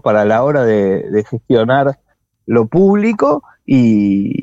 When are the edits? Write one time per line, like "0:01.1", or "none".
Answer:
none